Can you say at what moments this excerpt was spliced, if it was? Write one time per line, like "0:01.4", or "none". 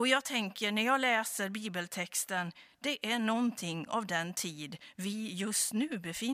none